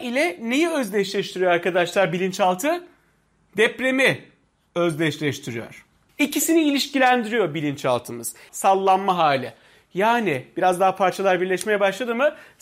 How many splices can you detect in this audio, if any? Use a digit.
2